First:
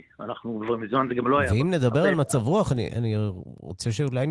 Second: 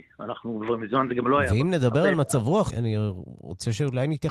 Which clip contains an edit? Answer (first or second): second